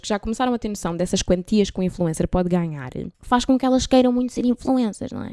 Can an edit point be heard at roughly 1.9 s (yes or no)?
no